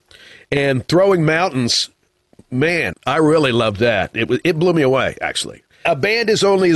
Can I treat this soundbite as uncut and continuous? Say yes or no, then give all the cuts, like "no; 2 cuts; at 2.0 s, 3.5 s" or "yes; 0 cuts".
no; 1 cut; at 2.9 s